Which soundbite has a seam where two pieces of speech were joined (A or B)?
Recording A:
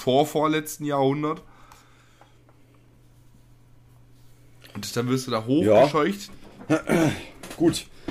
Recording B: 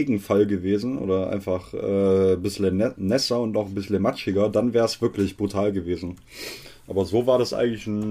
A